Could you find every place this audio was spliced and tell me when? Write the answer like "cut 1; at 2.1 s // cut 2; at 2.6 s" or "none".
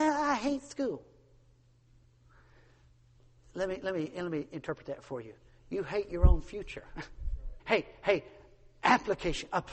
cut 1; at 7.6 s